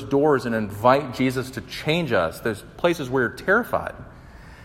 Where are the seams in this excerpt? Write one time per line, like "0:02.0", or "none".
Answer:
none